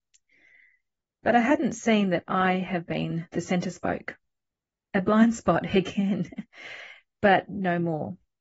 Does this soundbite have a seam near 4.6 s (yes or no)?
no